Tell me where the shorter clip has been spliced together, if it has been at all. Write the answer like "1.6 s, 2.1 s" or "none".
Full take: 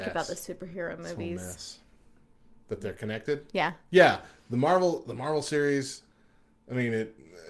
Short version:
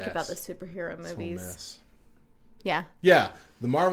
2.6 s